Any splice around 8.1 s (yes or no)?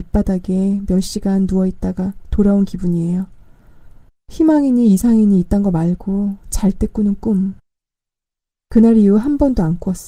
no